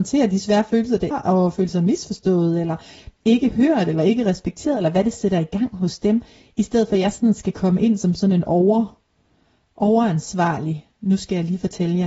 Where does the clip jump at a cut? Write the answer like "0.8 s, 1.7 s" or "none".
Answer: 1.1 s